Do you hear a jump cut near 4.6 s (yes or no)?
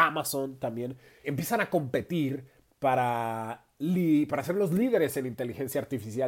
no